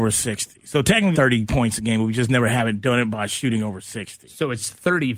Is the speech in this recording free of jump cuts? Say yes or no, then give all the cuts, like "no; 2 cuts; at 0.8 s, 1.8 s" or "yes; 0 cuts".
no; 1 cut; at 1.1 s